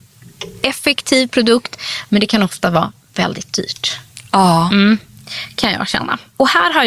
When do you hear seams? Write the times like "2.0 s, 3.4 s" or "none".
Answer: none